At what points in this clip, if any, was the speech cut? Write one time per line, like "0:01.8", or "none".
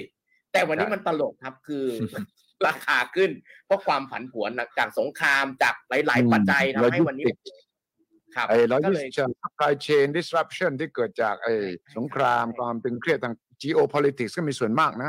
0:06.4
0:11.9